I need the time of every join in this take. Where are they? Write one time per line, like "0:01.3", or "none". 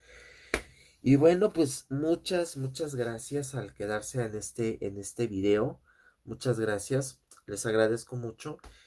none